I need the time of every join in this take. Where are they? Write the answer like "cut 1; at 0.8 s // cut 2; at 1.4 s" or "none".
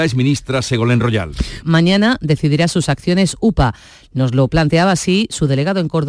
cut 1; at 1.6 s